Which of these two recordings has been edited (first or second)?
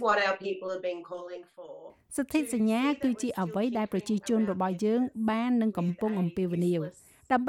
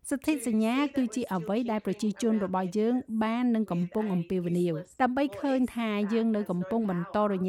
second